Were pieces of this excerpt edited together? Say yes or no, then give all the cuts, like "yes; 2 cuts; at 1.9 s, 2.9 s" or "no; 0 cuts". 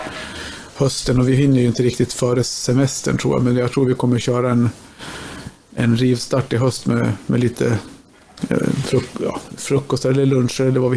no; 0 cuts